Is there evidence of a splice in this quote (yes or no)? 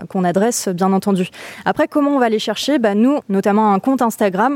yes